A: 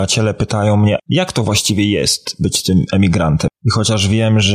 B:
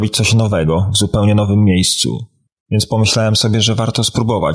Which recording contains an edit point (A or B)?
A